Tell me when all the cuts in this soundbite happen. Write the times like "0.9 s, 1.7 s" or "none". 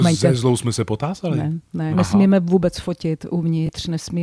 1.9 s